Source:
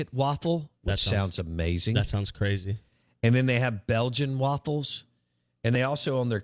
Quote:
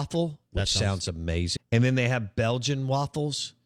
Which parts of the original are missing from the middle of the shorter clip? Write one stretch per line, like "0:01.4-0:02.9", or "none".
0:01.9-0:03.1